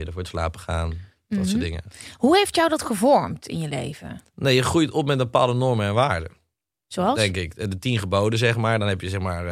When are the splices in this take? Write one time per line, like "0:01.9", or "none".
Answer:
none